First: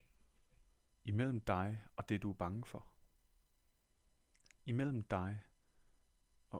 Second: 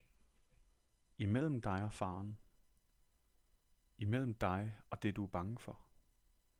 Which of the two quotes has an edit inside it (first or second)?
first